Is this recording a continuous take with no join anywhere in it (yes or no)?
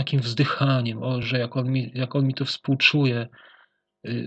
yes